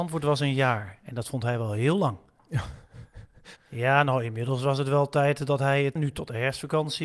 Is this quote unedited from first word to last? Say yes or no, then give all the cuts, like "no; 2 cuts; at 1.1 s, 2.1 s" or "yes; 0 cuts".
no; 2 cuts; at 3.6 s, 6.0 s